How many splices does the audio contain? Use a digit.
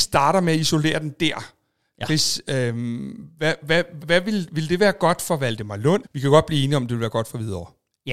2